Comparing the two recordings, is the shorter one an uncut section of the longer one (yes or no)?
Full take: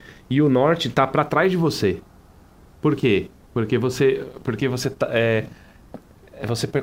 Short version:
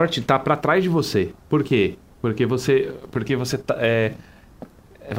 no